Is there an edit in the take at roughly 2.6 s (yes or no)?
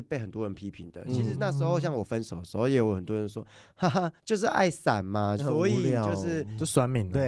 no